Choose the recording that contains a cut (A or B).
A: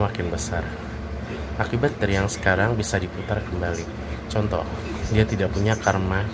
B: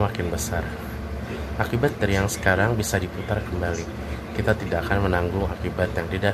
A